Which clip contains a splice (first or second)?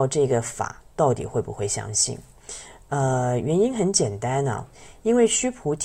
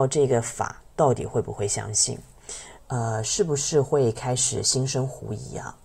second